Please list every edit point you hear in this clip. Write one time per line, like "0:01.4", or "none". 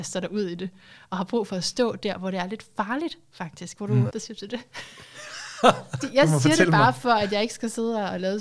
0:04.1
0:06.0